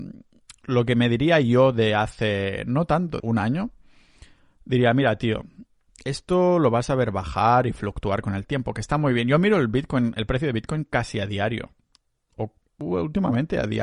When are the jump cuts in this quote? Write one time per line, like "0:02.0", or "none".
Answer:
0:03.2